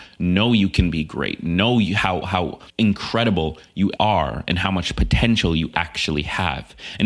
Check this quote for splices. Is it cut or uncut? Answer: cut